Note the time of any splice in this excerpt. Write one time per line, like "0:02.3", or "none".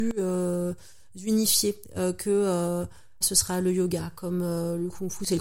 0:03.2